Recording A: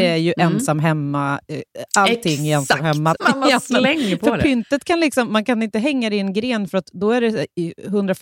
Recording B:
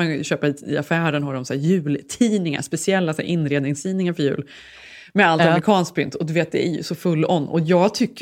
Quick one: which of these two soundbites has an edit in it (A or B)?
A